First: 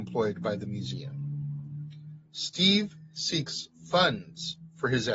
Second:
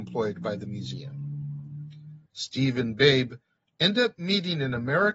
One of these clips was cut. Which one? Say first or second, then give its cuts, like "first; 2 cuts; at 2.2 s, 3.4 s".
second; 1 cut; at 2.3 s